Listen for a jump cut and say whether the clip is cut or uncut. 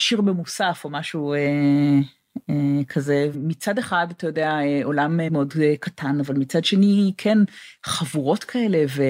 cut